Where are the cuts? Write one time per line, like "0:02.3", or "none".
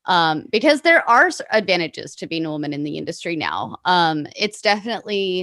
none